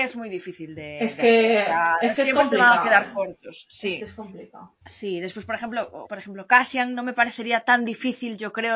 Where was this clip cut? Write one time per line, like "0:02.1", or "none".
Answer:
0:04.8
0:06.0